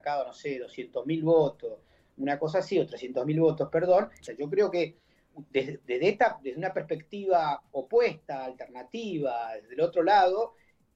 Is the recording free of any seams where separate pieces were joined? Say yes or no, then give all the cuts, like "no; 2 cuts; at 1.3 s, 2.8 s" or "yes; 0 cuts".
no; 1 cut; at 4.3 s